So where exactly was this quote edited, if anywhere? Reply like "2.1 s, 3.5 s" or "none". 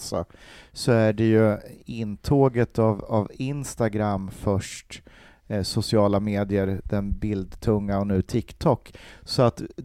none